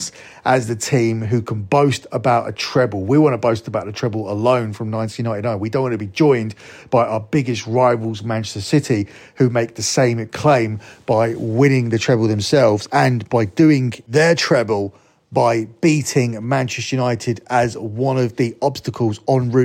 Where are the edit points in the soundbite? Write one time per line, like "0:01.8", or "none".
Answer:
none